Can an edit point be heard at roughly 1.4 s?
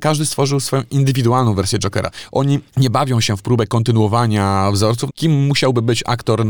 no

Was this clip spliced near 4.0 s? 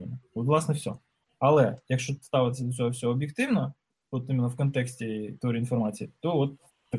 no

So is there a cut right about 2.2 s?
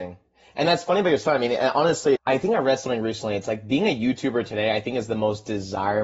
yes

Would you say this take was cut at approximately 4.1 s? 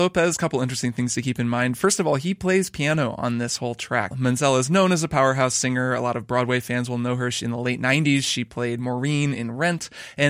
yes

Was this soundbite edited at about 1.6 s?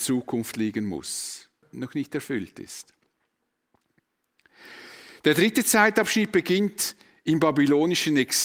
yes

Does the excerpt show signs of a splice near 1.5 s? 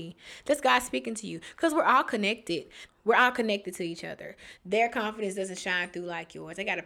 no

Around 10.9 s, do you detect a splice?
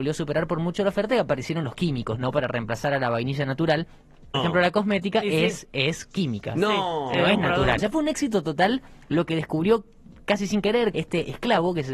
yes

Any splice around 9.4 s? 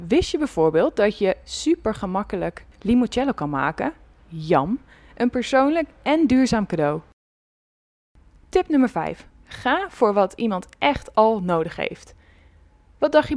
no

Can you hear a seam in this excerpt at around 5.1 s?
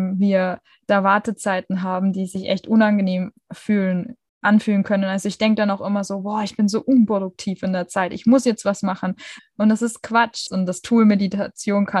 no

